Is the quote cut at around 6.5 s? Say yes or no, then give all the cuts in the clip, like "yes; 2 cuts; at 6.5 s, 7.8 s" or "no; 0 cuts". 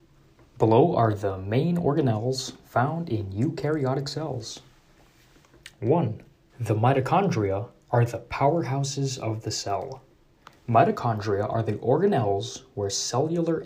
yes; 1 cut; at 6.5 s